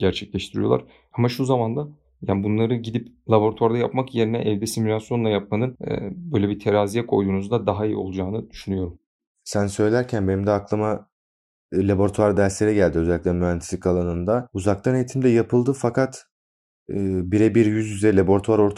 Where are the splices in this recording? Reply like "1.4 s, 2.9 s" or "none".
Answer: none